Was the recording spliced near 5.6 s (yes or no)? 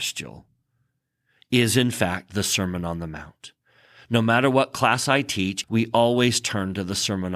yes